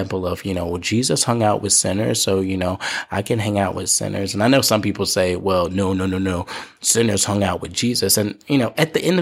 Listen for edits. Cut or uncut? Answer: uncut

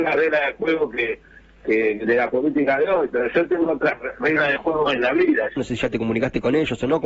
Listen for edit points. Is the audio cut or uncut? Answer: cut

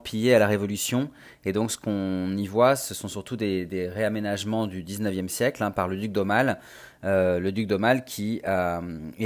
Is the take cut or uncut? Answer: uncut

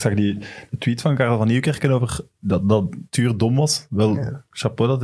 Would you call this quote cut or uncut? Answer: uncut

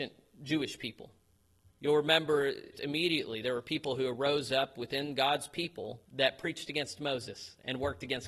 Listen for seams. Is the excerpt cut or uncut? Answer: cut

